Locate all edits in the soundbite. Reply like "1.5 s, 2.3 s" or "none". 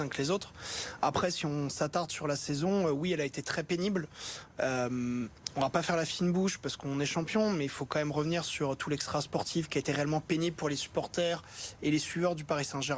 none